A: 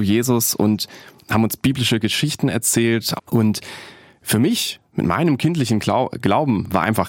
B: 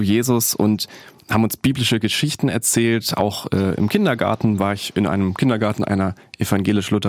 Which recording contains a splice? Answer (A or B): A